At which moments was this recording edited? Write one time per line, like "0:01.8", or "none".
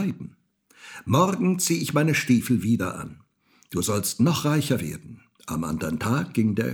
0:05.4

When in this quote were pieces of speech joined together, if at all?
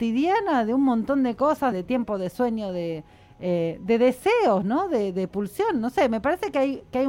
0:01.7

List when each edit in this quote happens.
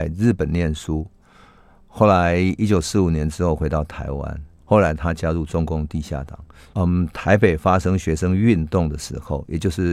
0:04.6
0:06.7

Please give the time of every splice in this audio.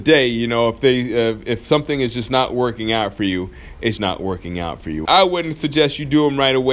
0:04.0
0:05.1

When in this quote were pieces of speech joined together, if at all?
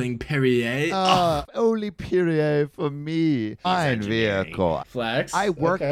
0:03.6
0:04.8

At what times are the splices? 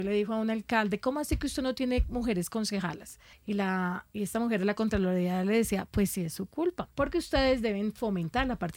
0:03.3
0:06.9

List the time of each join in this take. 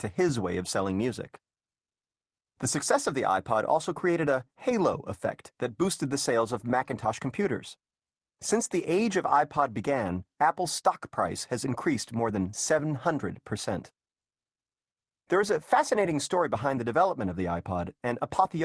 none

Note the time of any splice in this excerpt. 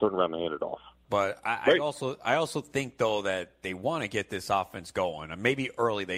0:01.0

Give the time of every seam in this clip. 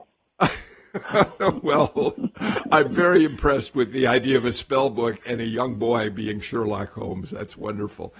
none

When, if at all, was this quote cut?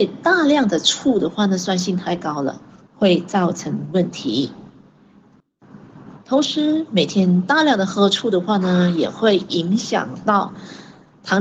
0:02.8

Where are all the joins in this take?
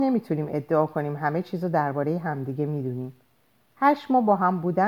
none

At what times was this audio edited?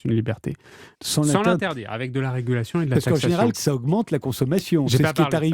0:00.9
0:03.5

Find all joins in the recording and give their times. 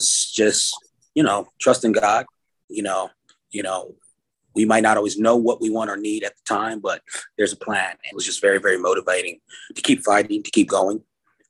0:02.6
0:08.1

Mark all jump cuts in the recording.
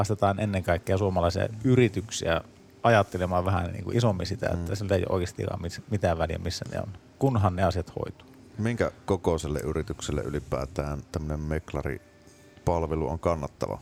0:03.9

